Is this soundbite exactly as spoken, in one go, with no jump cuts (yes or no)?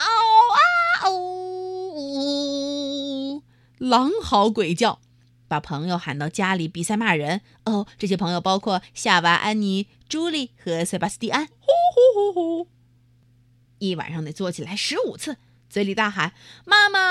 no